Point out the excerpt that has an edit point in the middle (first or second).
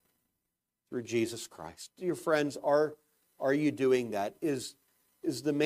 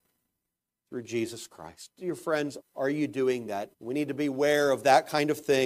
second